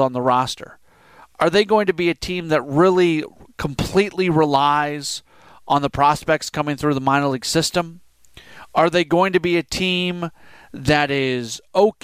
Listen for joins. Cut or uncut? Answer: uncut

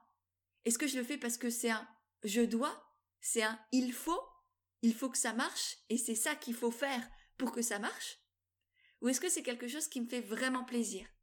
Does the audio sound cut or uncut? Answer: uncut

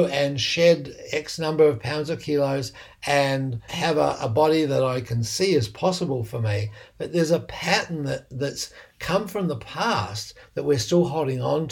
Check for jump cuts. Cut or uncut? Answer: cut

